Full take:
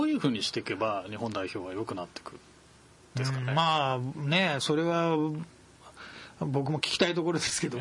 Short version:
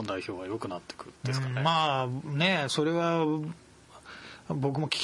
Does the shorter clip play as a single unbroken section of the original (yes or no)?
no